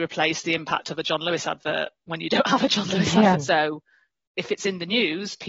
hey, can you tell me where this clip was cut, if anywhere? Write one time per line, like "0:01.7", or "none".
0:03.3